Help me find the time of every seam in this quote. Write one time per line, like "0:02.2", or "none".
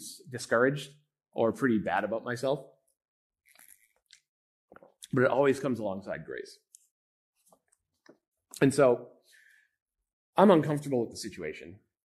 none